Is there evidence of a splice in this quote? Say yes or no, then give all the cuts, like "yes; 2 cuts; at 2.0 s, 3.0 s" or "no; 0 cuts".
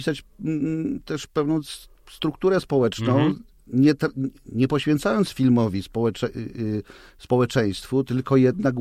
no; 0 cuts